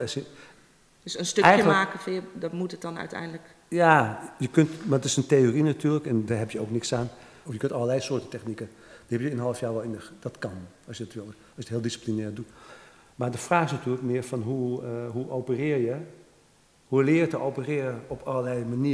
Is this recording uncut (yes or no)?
no